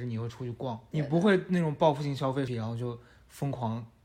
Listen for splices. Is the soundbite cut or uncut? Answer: cut